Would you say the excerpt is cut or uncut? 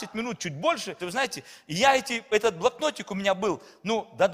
cut